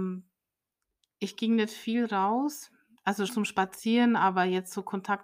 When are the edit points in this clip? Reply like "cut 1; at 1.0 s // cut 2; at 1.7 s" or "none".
cut 1; at 3.3 s